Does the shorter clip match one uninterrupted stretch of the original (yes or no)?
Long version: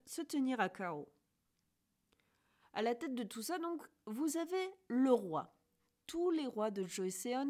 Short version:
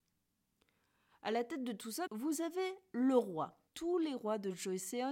no